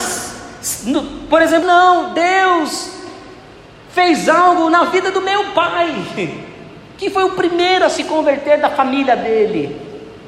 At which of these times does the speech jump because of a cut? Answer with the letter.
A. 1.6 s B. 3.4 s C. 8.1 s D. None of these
A